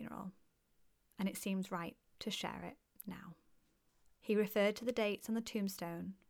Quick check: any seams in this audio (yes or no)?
yes